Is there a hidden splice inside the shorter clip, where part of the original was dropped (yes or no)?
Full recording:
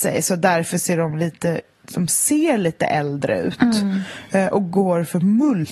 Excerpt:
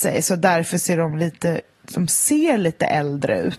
no